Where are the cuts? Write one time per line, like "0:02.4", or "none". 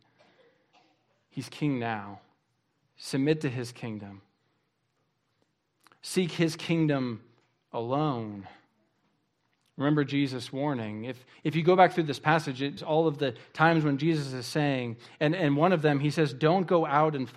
0:12.8